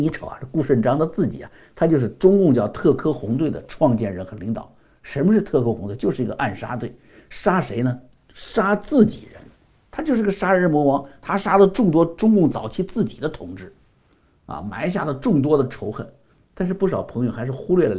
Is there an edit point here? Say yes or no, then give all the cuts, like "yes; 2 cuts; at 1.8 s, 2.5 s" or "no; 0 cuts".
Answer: yes; 1 cut; at 16.3 s